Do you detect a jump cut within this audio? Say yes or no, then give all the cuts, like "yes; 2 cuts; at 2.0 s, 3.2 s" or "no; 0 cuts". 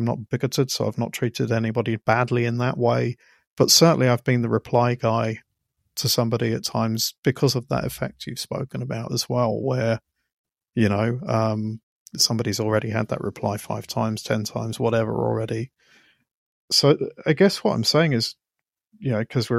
no; 0 cuts